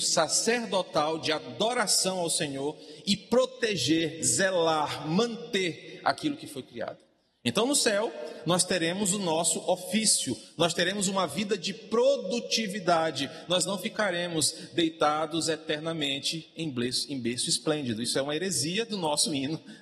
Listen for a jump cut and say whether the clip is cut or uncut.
uncut